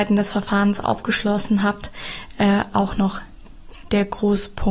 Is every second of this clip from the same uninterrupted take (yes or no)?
yes